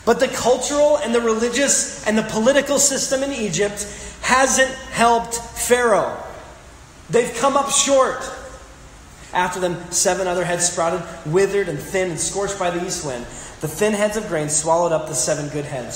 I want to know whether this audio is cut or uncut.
cut